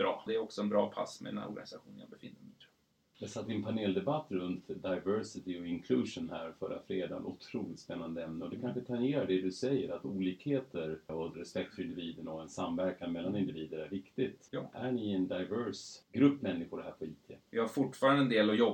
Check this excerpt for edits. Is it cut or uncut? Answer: cut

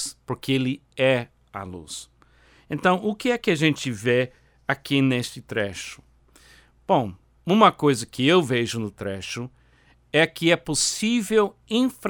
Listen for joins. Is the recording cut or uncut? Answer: uncut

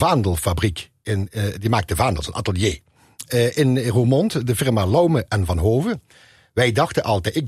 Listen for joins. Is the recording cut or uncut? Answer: uncut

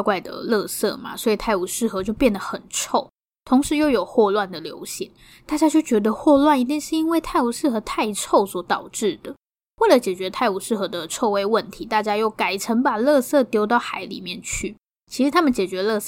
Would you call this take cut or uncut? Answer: uncut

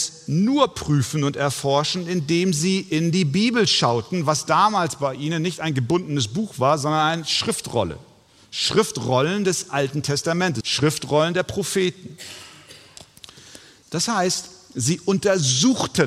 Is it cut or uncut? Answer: cut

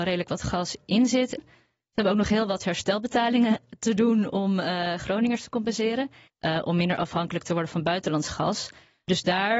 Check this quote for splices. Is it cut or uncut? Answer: cut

